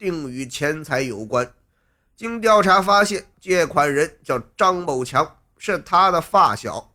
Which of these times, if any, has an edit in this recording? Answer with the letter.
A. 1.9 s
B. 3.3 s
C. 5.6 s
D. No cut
B